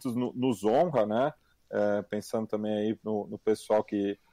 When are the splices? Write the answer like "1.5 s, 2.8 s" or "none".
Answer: none